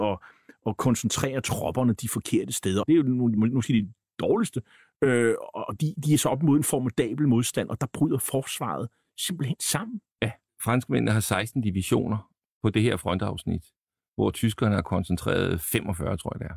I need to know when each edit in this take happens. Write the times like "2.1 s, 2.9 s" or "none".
2.8 s

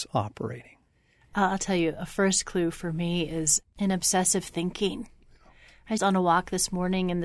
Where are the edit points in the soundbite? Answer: 6.0 s

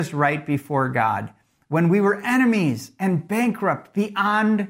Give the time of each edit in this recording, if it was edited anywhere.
none

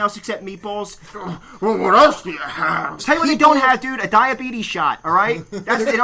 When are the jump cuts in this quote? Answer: 1.1 s, 3.0 s

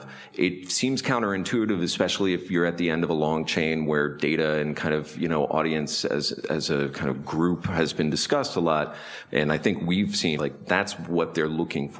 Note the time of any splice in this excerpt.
9.3 s, 10.4 s

